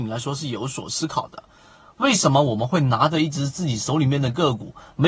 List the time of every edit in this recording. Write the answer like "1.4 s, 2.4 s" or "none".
none